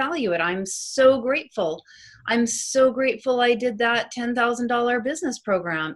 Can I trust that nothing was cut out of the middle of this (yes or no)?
yes